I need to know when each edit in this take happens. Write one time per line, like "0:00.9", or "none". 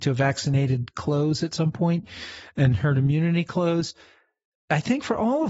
none